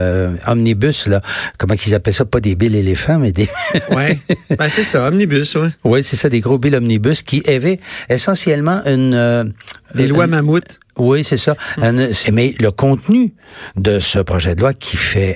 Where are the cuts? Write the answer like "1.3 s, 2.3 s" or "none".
12.2 s